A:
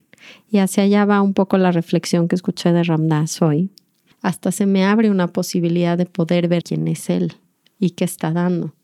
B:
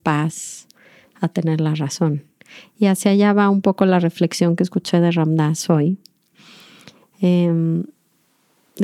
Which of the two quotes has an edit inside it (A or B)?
A